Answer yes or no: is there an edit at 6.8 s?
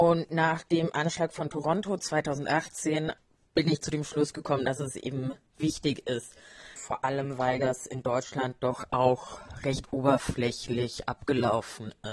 yes